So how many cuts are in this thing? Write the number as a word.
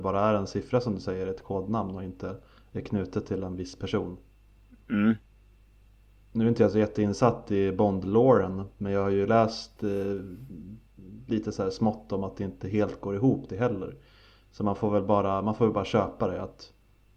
zero